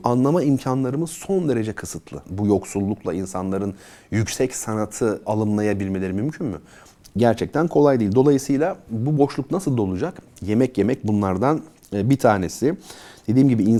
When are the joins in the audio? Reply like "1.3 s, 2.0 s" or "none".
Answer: 2.2 s